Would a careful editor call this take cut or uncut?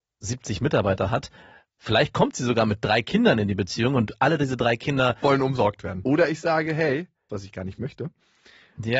cut